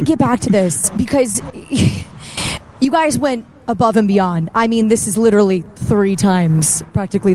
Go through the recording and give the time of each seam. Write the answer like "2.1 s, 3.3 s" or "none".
none